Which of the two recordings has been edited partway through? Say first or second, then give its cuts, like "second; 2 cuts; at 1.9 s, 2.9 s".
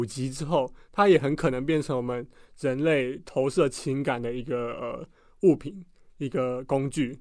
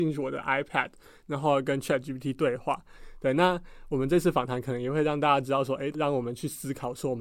second; 2 cuts; at 3.0 s, 5.9 s